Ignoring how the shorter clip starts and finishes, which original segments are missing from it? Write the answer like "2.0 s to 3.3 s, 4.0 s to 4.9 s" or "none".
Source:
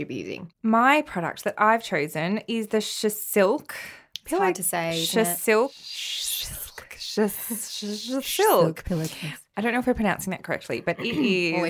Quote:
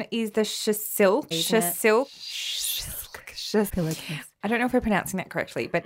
3.7 s to 4.9 s, 7.3 s to 8.8 s